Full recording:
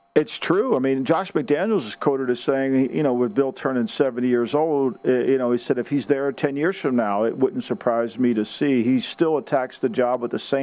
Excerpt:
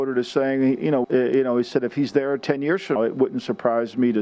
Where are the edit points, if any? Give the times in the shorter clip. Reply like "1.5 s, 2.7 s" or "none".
1.0 s, 3.0 s